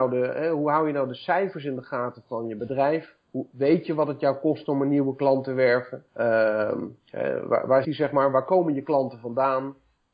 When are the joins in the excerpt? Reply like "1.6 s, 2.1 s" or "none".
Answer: 6.1 s, 7.8 s